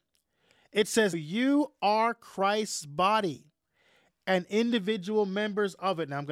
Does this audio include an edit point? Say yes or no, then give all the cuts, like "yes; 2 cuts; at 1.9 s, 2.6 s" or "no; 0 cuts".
yes; 1 cut; at 1.1 s